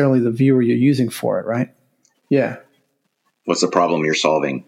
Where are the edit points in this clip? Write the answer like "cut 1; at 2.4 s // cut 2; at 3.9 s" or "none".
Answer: cut 1; at 2.1 s